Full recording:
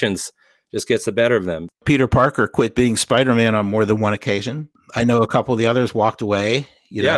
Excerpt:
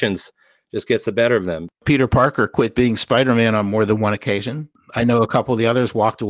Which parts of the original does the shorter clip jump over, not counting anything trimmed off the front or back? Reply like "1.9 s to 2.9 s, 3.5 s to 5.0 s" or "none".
none